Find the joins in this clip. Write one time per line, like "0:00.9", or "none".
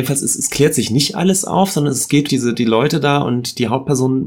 0:02.3